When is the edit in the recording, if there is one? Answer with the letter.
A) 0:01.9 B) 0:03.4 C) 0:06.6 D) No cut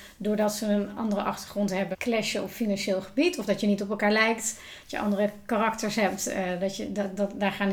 A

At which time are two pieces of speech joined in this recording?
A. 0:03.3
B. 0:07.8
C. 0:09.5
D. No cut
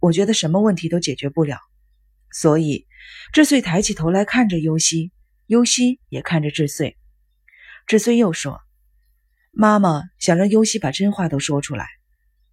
A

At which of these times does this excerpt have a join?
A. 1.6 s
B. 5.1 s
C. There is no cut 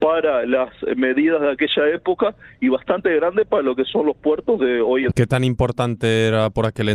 B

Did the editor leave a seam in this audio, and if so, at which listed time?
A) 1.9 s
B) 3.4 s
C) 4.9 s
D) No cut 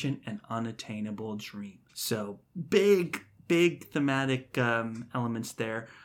A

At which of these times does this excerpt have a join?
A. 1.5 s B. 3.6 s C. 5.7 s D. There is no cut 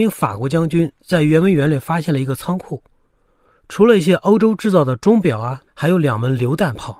C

